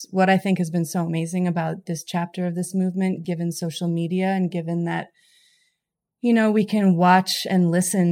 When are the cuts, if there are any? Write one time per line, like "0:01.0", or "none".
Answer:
none